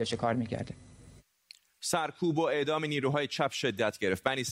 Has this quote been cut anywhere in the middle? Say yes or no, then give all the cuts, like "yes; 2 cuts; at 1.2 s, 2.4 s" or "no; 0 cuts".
no; 0 cuts